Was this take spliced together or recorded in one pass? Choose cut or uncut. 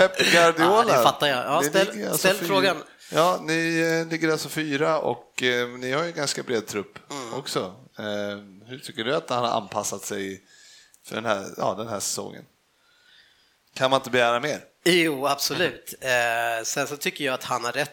uncut